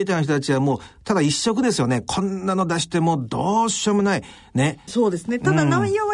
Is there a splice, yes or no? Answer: yes